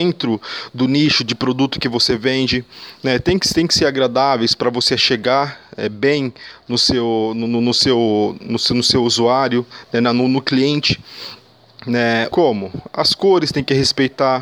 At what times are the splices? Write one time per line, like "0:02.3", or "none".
0:12.3